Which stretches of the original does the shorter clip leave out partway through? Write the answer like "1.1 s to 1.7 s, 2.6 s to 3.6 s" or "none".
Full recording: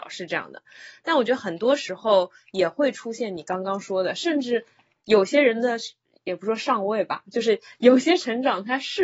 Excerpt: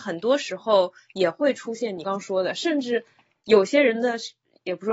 3.4 s to 3.6 s